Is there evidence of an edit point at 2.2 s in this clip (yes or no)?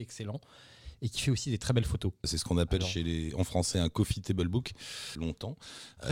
yes